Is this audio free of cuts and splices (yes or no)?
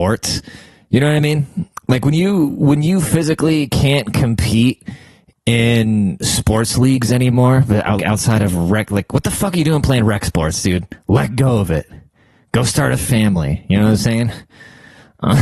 no